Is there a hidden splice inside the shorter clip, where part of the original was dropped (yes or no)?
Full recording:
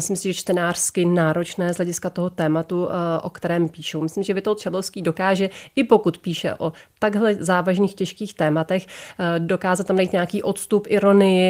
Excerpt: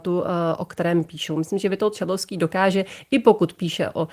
no